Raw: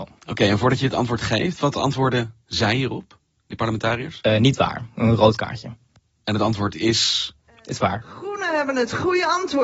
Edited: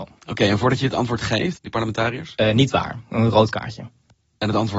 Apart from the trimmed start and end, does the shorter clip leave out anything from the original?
yes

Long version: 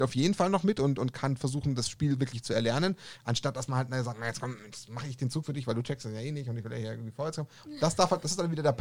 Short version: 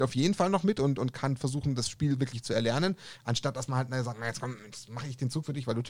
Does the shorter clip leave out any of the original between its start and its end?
no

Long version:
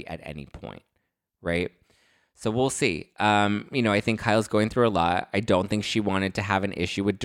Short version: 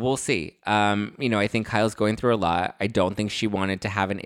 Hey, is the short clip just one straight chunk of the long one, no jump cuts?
yes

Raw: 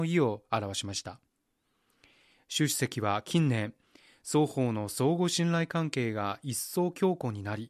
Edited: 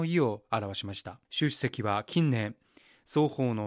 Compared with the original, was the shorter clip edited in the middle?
yes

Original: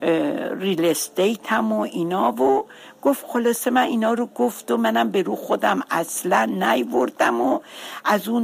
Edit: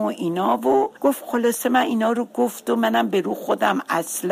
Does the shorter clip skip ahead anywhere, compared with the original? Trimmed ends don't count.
yes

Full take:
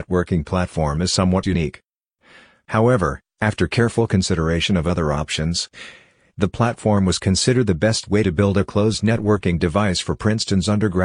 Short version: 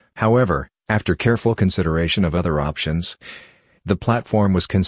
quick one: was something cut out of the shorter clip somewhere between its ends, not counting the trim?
no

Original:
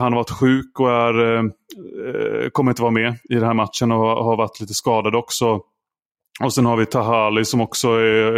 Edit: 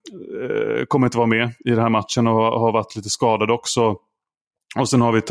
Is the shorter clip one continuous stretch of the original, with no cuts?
yes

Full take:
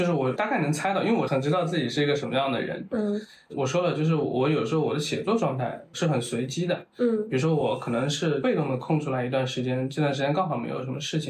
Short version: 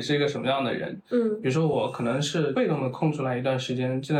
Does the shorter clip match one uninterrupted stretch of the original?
no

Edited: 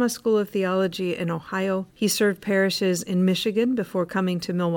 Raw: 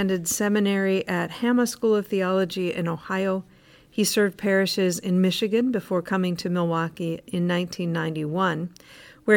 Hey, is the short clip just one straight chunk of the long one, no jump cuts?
no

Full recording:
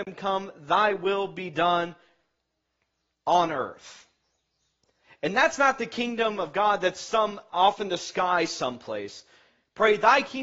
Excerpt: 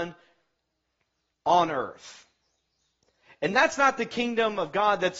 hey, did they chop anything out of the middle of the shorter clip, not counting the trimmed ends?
no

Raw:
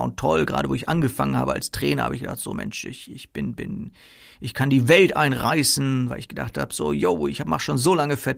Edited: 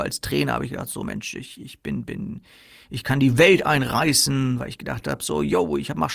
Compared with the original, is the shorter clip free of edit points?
yes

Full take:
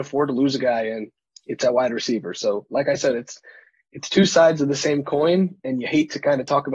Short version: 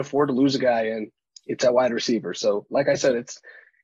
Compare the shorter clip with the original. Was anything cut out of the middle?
no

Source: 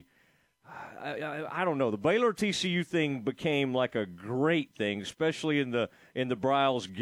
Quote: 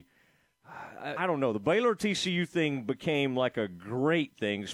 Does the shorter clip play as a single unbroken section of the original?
no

